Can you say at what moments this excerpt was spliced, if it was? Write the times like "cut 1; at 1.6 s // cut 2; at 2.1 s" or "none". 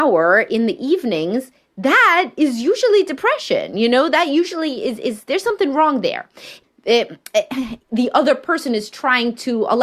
cut 1; at 6.6 s // cut 2; at 7.8 s